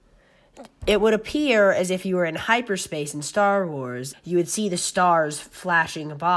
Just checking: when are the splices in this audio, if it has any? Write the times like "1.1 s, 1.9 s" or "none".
4.1 s